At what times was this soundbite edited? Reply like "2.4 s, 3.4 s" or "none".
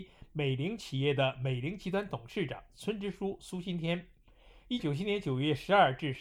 4.8 s